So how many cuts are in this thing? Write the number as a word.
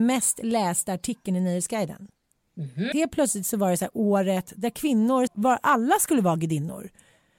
two